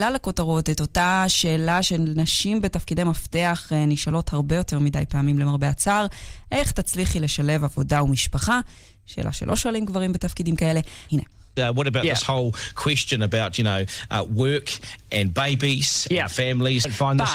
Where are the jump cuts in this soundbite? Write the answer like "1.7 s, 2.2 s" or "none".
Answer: 11.1 s